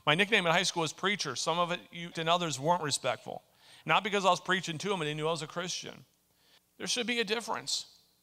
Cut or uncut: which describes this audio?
cut